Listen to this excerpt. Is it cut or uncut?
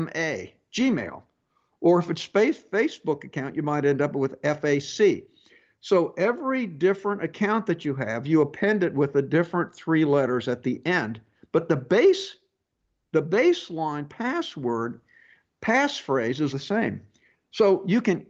cut